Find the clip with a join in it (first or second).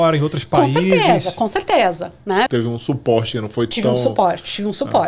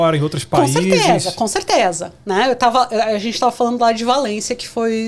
first